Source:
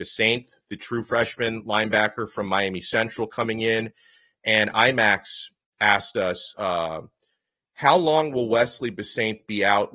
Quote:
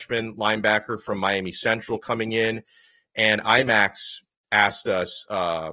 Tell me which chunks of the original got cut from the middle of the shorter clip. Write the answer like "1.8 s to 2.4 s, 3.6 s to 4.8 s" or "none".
none